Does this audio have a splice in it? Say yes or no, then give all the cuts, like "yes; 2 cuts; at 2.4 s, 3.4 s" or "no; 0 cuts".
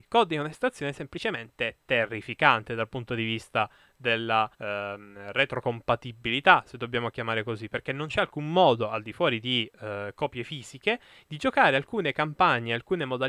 yes; 1 cut; at 4.5 s